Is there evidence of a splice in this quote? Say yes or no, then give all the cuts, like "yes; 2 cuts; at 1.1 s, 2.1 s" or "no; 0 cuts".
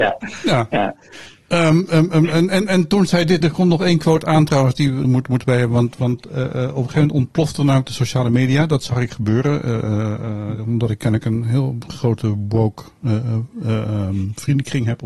yes; 2 cuts; at 3.4 s, 5.0 s